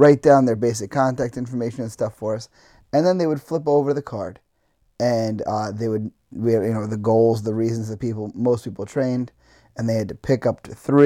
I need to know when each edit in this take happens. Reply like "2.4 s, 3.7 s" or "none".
none